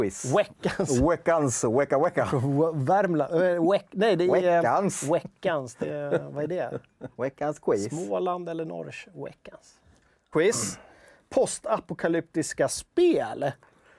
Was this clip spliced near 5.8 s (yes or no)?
no